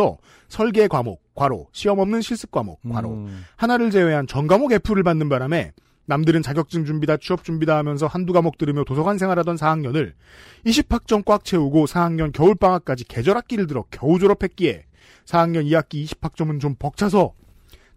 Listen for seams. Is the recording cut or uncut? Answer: uncut